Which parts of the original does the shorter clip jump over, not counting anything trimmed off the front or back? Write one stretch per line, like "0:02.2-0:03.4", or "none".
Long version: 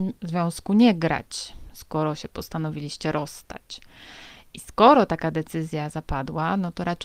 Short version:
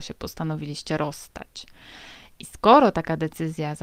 none